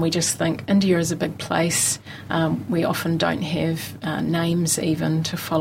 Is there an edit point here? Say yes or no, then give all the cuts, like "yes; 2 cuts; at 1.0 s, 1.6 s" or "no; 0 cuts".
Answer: no; 0 cuts